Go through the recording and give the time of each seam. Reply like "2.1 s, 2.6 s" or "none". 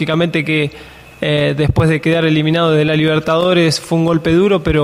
none